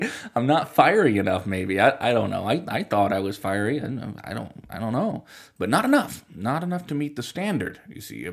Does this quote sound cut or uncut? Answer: uncut